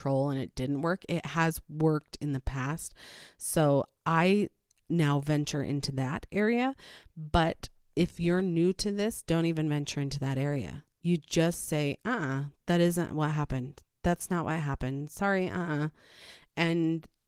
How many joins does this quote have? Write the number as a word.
zero